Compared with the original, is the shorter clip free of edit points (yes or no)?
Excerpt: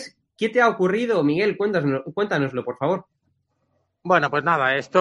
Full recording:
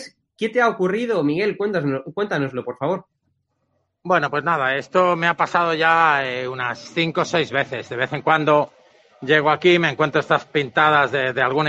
yes